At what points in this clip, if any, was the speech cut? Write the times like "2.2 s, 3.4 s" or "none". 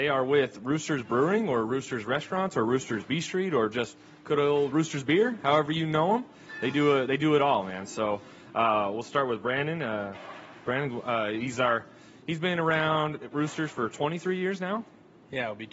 none